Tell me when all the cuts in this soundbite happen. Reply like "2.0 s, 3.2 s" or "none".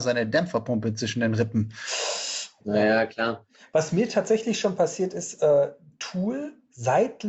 2.6 s